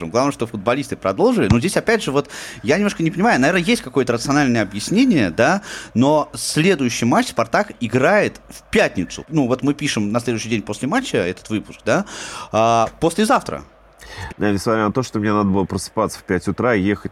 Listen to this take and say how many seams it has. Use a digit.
1